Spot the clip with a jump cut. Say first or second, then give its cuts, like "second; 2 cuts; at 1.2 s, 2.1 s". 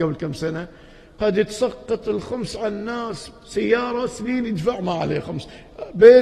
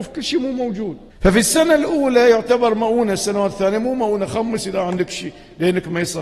second; 1 cut; at 1.1 s